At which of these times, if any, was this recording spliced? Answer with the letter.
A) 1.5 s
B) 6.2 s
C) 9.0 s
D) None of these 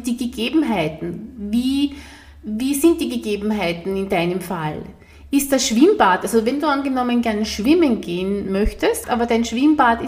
C